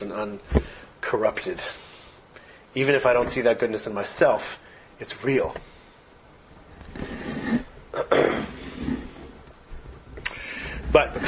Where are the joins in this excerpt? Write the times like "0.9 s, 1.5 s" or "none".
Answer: 6.8 s